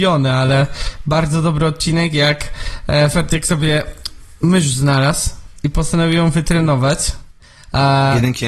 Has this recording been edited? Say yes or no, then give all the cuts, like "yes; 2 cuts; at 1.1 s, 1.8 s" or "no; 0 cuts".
no; 0 cuts